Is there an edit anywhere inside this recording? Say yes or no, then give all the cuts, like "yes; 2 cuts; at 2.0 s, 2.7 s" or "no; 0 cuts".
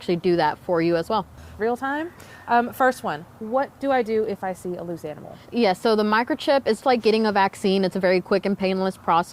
yes; 3 cuts; at 1.6 s, 5.5 s, 6.8 s